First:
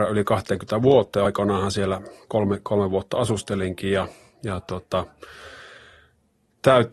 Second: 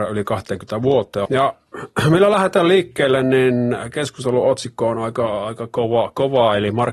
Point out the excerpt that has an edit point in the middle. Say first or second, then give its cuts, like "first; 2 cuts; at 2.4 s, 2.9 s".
second; 1 cut; at 1.3 s